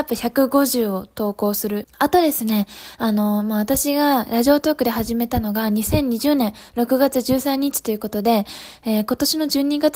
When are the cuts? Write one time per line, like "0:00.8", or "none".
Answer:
0:01.8

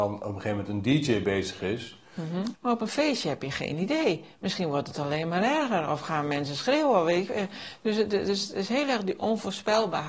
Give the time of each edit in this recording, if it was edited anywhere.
0:02.5

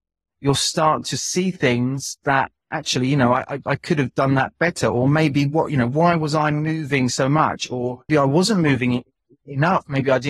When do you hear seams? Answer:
0:08.1

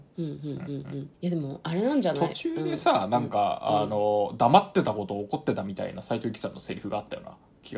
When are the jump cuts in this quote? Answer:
0:01.1

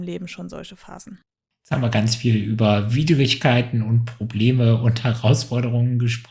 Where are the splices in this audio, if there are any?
none

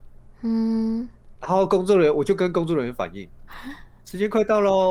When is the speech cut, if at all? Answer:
0:01.4
0:03.5

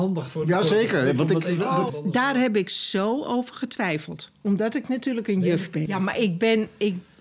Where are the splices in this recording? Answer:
0:01.9
0:05.9

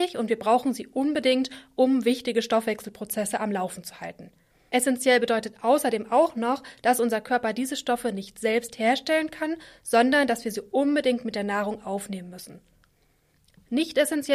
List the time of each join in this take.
none

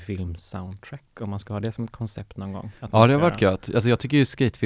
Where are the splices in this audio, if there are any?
none

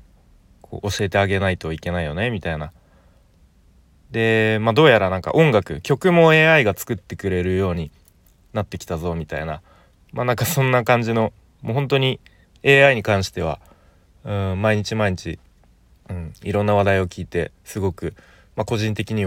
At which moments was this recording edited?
none

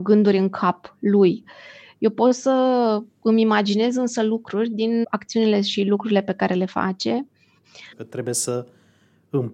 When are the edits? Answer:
0:05.0
0:07.9

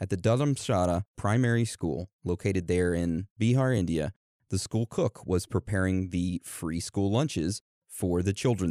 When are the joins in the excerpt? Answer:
none

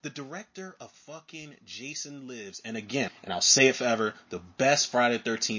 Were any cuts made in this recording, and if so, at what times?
0:03.1

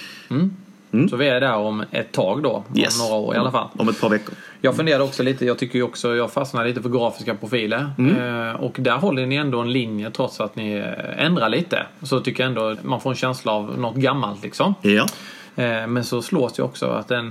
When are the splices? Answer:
0:12.7

